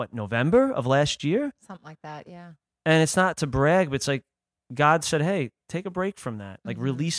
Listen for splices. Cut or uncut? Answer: uncut